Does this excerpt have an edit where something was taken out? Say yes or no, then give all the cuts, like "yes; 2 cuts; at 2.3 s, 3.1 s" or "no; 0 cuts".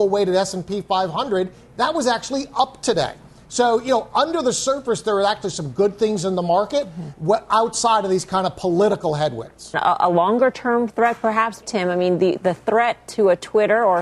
yes; 2 cuts; at 9.7 s, 11.6 s